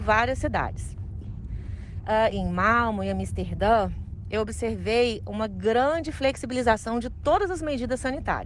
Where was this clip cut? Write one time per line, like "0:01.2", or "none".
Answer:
0:01.2
0:02.3